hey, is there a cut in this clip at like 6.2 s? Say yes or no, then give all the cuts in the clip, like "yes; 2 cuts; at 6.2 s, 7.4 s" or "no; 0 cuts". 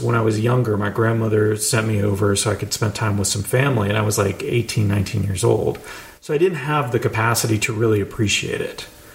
no; 0 cuts